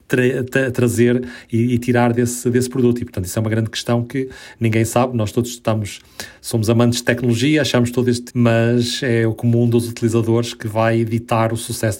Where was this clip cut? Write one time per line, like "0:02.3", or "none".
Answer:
0:08.3